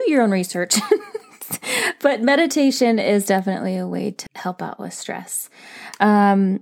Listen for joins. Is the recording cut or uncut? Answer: cut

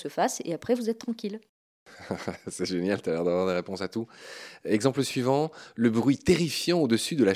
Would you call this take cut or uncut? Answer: uncut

